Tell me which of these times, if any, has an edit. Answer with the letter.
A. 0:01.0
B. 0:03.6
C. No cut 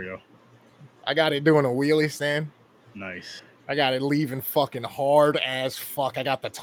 C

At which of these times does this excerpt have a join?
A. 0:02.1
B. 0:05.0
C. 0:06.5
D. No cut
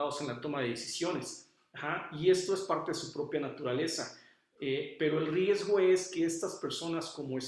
D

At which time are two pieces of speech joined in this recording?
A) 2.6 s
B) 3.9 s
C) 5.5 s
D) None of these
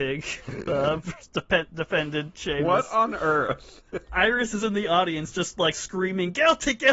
D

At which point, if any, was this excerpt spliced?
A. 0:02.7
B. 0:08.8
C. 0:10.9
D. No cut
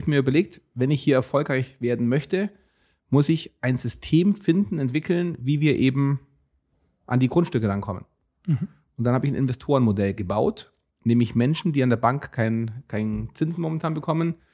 D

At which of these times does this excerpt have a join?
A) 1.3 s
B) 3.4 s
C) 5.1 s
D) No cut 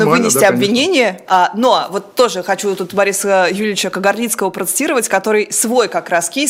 A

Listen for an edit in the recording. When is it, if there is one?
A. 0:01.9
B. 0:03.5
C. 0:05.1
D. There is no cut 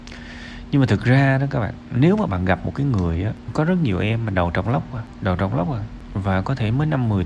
B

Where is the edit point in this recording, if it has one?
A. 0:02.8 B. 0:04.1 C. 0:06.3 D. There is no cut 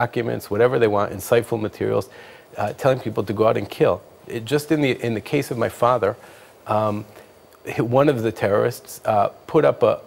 D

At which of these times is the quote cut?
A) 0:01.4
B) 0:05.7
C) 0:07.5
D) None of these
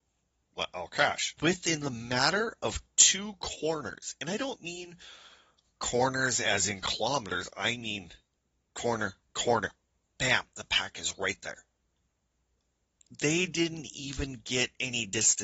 A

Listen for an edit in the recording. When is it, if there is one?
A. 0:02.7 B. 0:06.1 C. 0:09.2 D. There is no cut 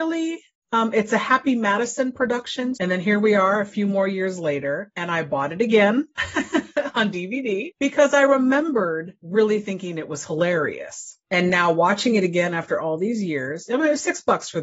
A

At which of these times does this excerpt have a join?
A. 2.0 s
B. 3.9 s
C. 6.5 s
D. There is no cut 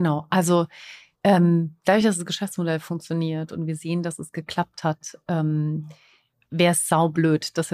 D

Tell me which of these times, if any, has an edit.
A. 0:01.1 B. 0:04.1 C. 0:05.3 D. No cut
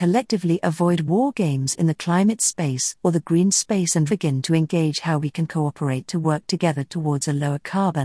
B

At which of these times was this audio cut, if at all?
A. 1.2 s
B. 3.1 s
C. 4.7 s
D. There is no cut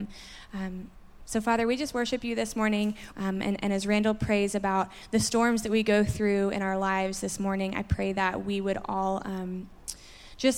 B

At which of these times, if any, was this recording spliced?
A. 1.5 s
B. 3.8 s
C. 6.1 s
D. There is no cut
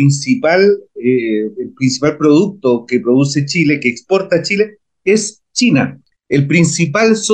C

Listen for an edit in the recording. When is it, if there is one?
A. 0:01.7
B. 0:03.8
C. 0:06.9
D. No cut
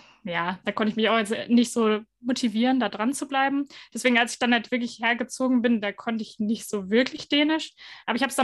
D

